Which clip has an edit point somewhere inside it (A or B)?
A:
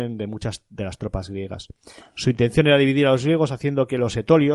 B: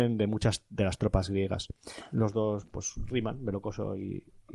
B